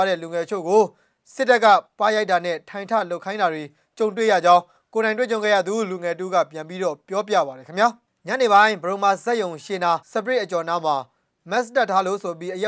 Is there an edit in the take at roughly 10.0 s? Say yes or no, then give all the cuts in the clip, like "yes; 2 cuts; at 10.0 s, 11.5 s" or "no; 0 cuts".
yes; 1 cut; at 10.0 s